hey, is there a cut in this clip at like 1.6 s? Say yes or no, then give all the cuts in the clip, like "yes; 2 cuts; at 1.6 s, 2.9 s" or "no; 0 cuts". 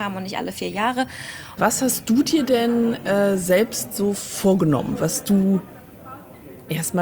yes; 1 cut; at 1.6 s